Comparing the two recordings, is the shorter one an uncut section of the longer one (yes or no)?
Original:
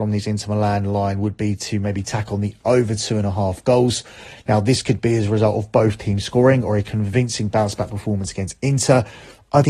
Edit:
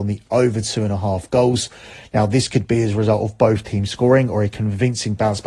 yes